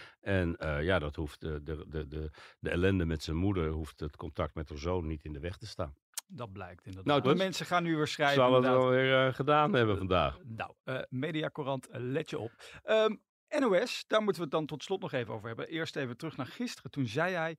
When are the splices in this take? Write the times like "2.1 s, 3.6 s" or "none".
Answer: 7.2 s